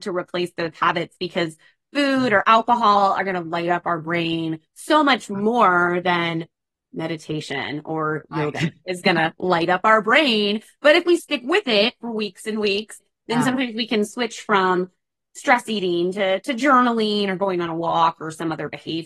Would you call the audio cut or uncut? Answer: uncut